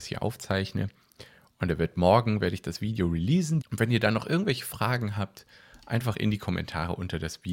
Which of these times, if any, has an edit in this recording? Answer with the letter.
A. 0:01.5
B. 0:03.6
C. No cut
B